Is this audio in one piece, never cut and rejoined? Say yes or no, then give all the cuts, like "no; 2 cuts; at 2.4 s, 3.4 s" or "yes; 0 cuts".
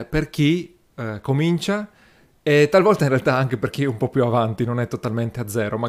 yes; 0 cuts